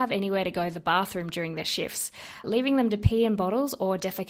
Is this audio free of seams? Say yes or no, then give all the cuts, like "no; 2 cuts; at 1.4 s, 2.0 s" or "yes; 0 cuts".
no; 1 cut; at 2.4 s